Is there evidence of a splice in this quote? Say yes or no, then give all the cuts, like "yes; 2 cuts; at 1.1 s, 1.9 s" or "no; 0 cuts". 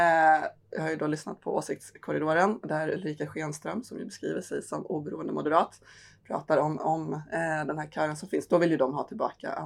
no; 0 cuts